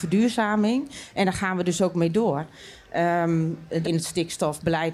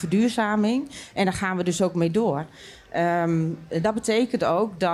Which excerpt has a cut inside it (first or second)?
first